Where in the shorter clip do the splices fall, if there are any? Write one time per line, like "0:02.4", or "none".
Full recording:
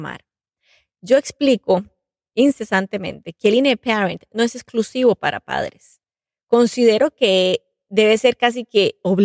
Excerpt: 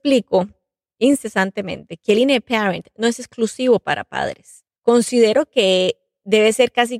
0:04.8